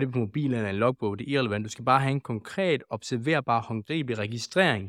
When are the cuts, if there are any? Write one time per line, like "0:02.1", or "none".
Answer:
none